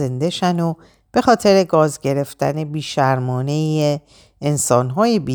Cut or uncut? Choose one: uncut